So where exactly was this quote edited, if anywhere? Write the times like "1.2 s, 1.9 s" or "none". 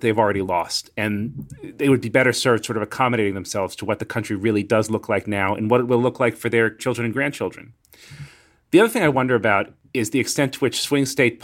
none

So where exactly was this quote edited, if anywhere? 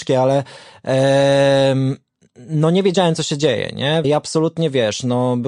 4.0 s

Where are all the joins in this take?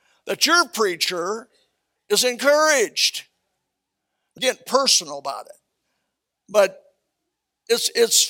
4.4 s, 6.3 s

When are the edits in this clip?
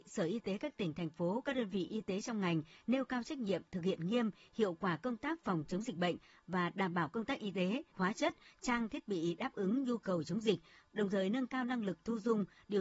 7.9 s, 10.9 s

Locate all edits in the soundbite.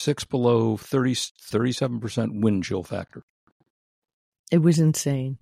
1.5 s

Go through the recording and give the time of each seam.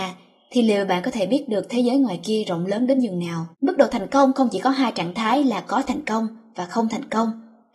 3.5 s

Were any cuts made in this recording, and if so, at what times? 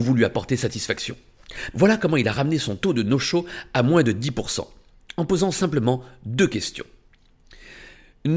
1.7 s

